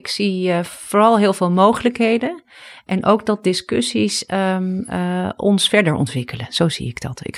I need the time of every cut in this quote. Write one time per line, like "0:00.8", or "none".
none

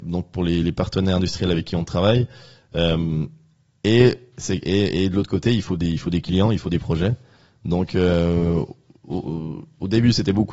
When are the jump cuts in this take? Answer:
none

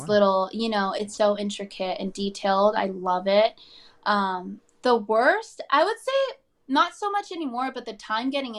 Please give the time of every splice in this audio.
0:01.2

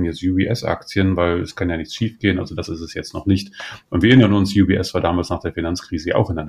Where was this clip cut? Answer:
none

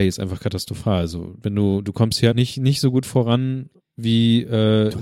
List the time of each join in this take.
0:02.3

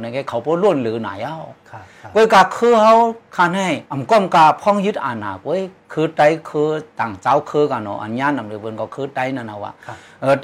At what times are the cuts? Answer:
0:03.8
0:05.8

